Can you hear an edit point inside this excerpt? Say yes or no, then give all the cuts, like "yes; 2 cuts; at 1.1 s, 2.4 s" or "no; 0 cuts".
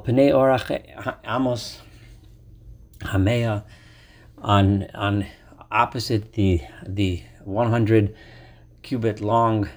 no; 0 cuts